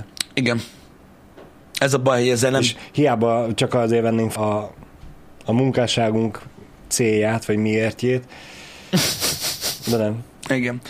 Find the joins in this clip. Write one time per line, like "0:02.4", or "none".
0:04.4